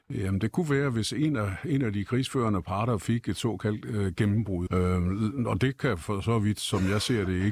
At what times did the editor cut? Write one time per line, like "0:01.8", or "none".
0:04.7